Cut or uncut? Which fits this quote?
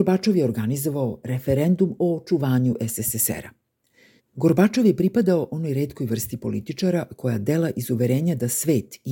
cut